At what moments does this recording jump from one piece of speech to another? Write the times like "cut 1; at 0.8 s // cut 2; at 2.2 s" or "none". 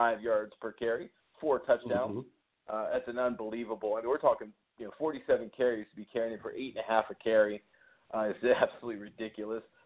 none